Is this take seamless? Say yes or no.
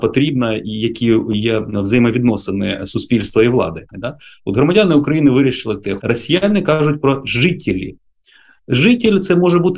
no